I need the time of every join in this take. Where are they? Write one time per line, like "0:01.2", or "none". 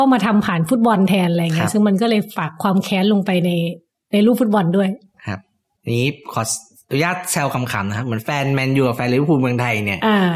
none